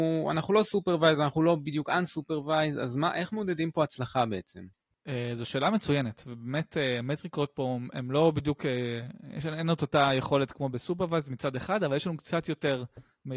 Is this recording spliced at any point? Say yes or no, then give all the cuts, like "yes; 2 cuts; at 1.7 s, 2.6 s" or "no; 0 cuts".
no; 0 cuts